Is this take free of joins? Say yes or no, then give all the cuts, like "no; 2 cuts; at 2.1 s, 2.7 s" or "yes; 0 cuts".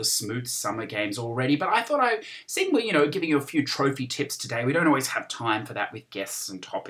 yes; 0 cuts